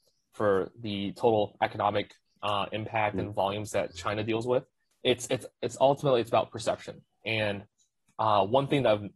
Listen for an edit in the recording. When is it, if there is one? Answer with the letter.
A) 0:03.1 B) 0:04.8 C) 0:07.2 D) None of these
B